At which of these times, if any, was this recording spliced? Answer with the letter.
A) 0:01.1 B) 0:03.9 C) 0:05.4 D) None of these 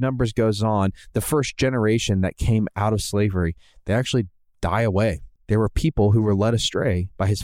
C